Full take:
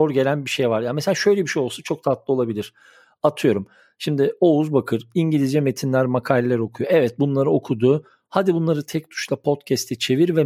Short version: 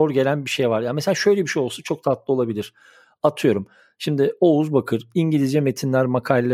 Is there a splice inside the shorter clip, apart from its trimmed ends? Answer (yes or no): no